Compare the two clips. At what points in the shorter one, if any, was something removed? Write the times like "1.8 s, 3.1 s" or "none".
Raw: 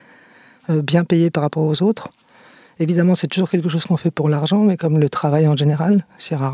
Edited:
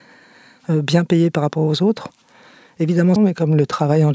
3.2 s

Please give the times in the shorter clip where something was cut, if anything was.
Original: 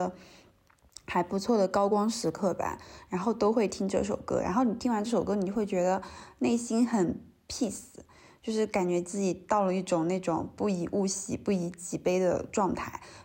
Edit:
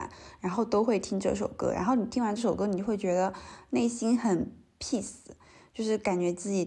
none

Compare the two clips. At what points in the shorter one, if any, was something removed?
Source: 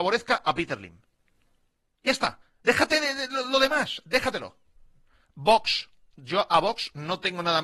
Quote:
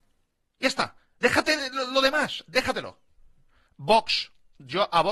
1.6 s

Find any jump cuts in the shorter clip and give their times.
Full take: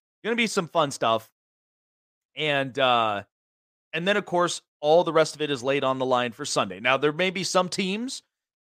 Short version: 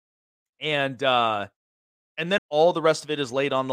2.4 s

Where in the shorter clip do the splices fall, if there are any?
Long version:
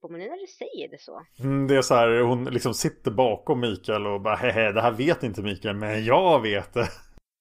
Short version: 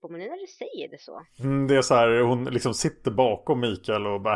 none

